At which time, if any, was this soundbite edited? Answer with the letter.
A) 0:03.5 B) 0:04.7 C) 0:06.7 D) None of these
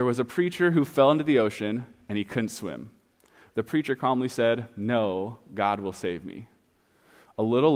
A